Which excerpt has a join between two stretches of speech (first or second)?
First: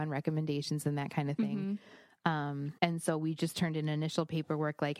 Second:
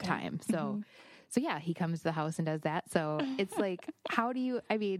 first